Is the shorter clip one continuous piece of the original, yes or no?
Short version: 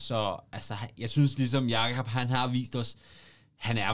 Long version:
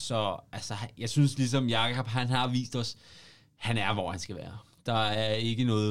yes